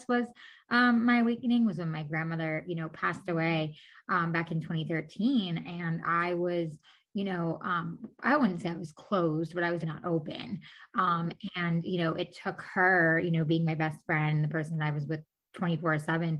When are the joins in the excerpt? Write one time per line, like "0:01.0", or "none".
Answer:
0:09.8